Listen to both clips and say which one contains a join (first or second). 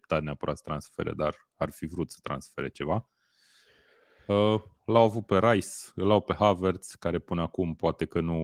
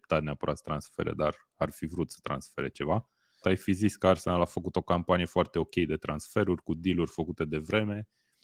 second